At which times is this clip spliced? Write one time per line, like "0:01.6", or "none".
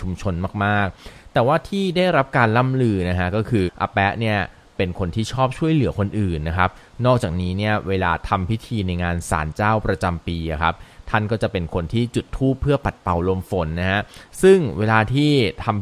0:03.7